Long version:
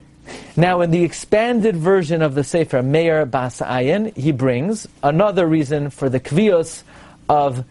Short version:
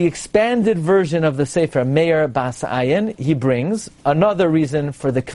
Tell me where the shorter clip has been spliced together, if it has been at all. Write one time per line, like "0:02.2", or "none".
none